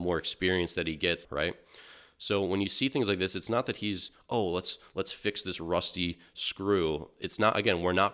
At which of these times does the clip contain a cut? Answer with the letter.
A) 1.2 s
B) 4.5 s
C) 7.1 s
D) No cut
A